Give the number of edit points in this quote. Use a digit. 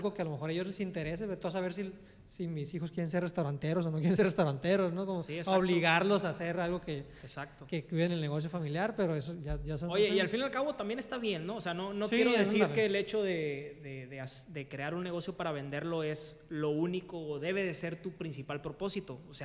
0